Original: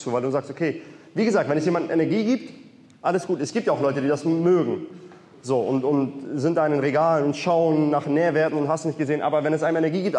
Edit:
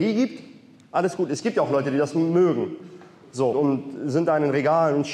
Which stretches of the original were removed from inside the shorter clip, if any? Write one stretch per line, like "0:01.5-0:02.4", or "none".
0:05.6-0:05.8